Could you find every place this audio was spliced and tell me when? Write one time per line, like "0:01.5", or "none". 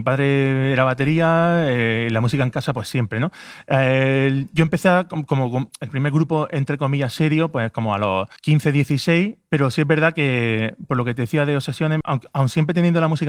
0:08.4
0:12.0